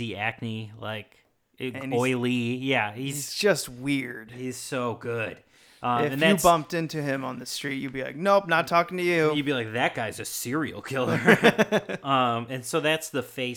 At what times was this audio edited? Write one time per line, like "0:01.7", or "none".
none